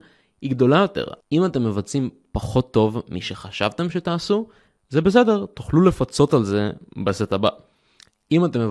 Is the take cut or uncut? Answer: cut